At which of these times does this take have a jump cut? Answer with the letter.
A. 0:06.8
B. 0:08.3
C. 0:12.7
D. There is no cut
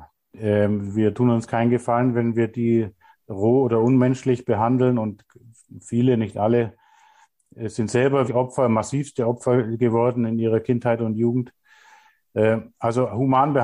B